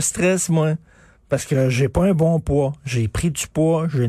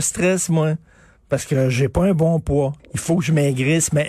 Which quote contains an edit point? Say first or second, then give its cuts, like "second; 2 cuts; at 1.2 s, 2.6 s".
second; 1 cut; at 2.8 s